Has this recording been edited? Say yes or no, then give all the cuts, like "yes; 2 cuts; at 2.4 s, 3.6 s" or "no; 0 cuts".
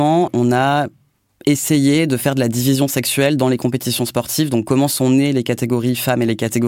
no; 0 cuts